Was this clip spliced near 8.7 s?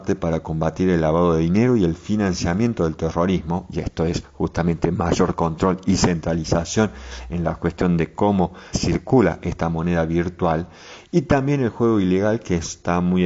yes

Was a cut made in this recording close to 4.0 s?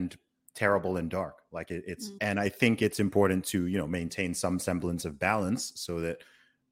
no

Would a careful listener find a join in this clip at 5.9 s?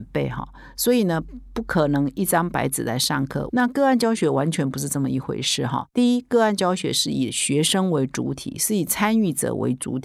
no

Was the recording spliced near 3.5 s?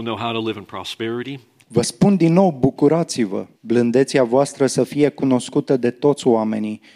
yes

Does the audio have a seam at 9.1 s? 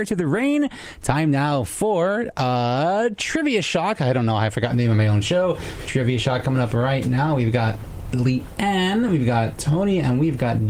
no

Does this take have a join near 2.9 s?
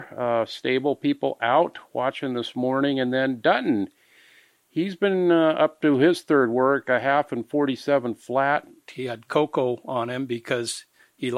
no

